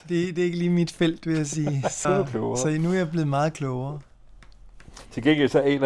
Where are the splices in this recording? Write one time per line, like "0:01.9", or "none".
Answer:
0:02.0